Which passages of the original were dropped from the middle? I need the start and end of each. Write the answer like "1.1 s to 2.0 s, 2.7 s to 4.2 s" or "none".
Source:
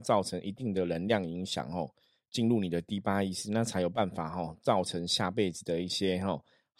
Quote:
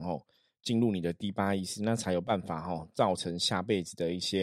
none